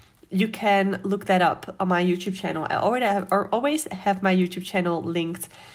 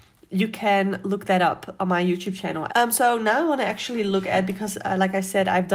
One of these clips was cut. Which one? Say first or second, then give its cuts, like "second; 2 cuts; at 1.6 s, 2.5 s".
second; 1 cut; at 2.7 s